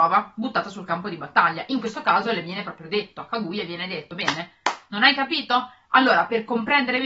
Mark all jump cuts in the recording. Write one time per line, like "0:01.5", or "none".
none

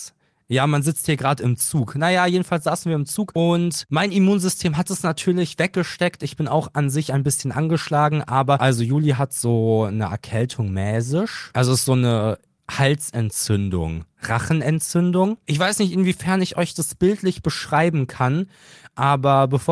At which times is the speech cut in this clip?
none

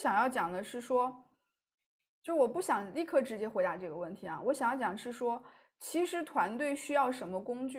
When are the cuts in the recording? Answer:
none

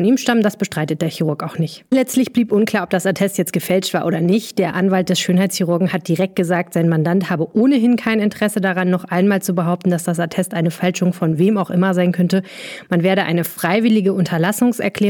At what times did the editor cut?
0:01.9

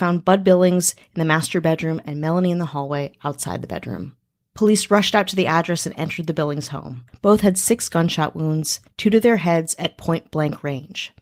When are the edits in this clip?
0:07.1

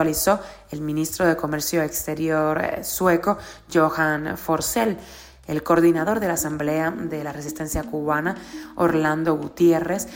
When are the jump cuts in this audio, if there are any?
none

